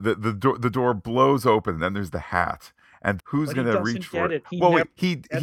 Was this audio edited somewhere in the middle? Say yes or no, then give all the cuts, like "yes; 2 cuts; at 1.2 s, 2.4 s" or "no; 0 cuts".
yes; 2 cuts; at 3.2 s, 4.4 s